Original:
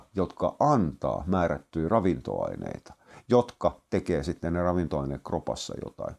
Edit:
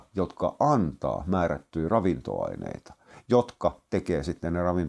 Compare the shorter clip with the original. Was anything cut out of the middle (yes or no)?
no